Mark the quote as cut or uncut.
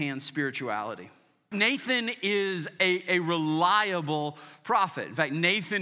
cut